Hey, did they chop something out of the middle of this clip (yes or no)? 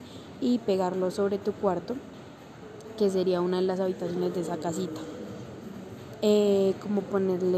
yes